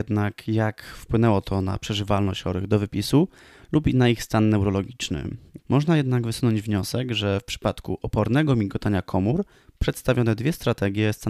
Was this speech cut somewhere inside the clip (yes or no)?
yes